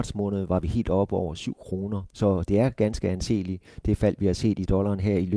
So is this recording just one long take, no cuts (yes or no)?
yes